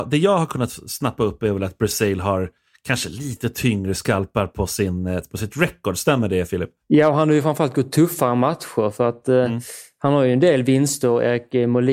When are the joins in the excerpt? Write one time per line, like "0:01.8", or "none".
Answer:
none